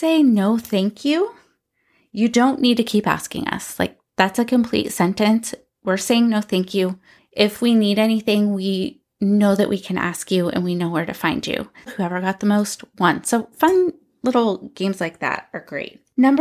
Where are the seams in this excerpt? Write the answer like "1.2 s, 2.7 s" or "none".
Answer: 7.2 s, 11.9 s